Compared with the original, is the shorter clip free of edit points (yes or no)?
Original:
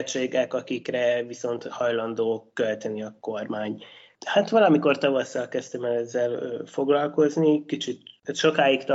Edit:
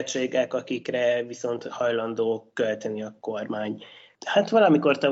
yes